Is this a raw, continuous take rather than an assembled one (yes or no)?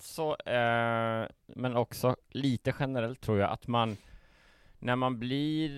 no